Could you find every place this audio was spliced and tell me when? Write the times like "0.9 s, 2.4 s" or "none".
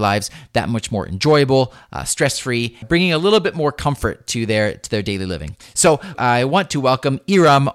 2.8 s, 6.1 s